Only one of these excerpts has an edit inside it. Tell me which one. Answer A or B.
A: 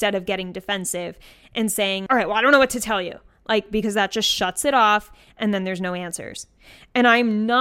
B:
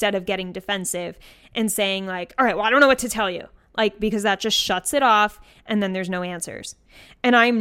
A